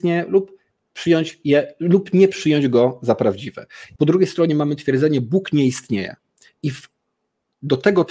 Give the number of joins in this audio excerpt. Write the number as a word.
one